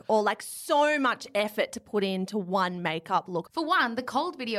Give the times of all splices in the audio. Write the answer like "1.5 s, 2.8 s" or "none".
3.5 s